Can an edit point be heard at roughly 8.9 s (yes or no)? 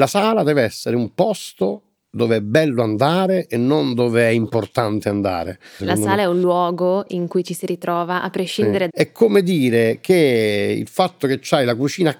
yes